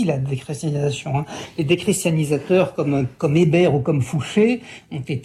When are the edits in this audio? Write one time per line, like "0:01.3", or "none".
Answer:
0:03.2

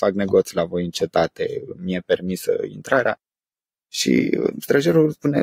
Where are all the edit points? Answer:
none

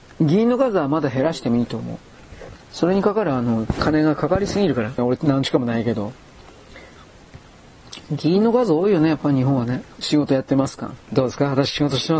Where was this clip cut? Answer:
0:02.6
0:05.0
0:09.9

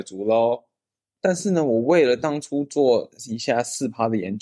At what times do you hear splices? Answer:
none

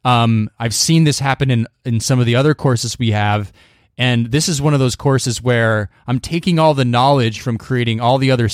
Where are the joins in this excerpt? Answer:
none

